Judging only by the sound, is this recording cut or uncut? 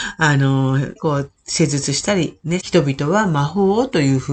cut